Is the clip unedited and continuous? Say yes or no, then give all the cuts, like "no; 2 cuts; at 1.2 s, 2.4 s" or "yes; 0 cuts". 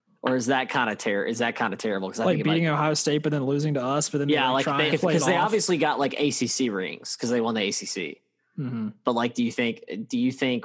no; 1 cut; at 4.9 s